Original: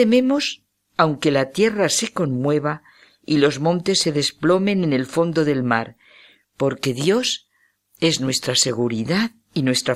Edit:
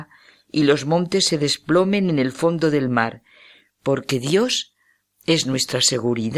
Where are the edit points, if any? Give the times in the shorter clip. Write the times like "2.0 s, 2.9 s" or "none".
none